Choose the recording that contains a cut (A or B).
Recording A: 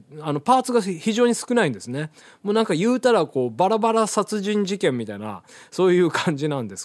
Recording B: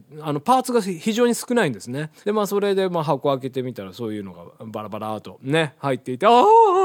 B